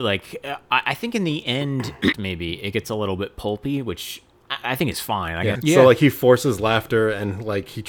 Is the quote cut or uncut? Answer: cut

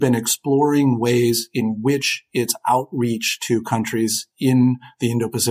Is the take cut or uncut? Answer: uncut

